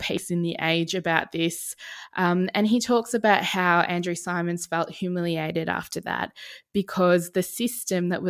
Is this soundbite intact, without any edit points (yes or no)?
yes